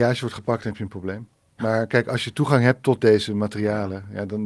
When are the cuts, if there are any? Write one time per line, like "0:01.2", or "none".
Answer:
none